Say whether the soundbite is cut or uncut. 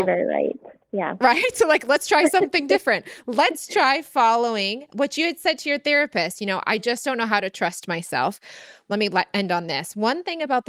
uncut